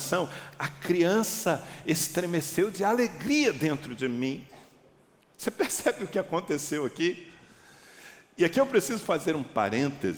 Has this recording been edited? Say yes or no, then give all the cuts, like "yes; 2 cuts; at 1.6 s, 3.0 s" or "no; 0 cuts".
no; 0 cuts